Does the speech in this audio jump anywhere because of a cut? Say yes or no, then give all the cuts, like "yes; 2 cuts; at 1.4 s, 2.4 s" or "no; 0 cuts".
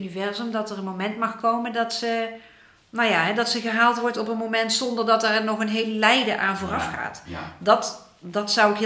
no; 0 cuts